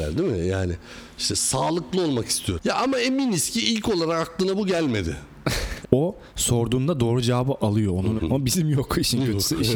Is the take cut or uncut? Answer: cut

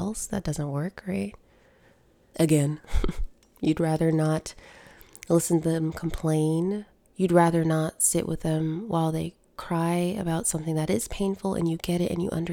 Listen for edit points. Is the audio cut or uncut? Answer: cut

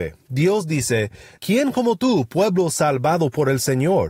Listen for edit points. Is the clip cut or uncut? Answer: cut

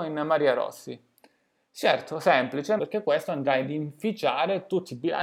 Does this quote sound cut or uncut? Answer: cut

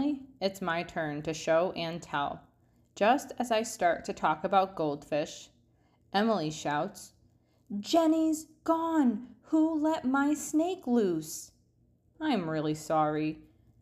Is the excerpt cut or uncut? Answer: cut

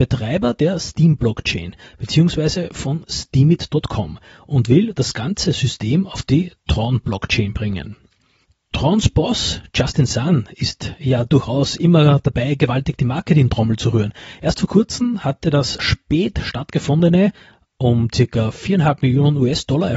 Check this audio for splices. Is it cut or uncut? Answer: cut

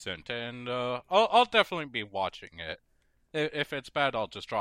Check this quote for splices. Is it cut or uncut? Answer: uncut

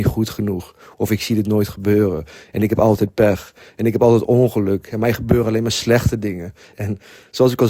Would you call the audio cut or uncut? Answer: cut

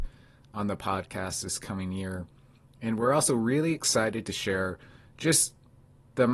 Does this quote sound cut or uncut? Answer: uncut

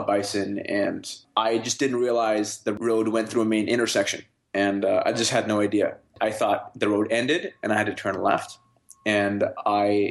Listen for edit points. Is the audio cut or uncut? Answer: uncut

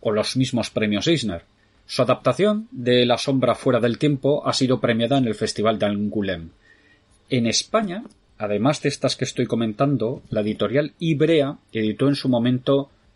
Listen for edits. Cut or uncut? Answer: uncut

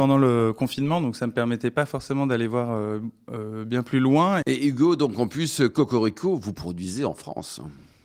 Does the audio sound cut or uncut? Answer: cut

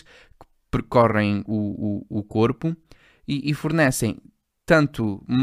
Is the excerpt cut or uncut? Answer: uncut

